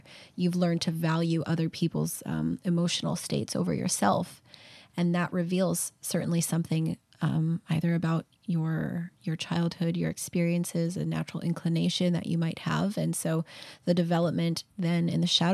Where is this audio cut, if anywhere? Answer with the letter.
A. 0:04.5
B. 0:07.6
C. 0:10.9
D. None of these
D